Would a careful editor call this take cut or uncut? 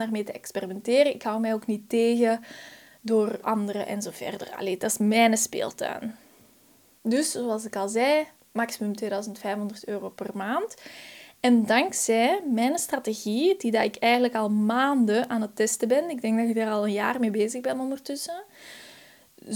cut